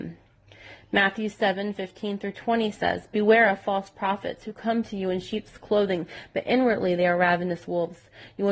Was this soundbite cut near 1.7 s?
no; 0 cuts

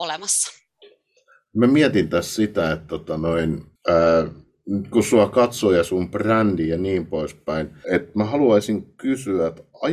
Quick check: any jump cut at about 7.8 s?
yes; 2 cuts; at 3.8 s, 7.8 s

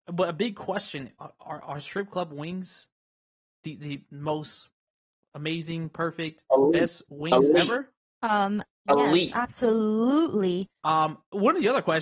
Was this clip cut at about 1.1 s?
no; 1 cut; at 10.8 s

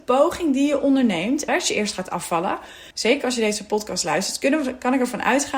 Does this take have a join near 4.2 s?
no; 2 cuts; at 1.5 s, 2.9 s

